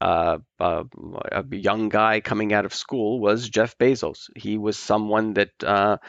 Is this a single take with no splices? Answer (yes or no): yes